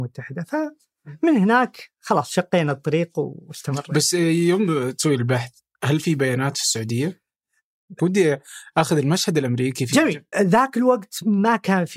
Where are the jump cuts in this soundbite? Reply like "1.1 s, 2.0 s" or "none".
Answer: 8.0 s, 10.3 s